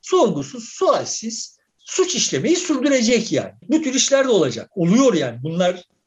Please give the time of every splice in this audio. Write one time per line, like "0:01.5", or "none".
0:01.7
0:03.6